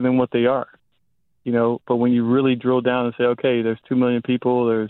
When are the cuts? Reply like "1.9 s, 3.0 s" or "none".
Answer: none